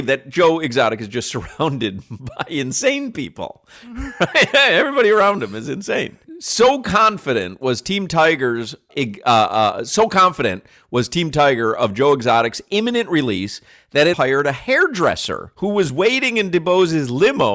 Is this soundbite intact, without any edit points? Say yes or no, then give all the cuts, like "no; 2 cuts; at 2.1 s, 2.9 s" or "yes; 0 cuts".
no; 2 cuts; at 8.9 s, 14.1 s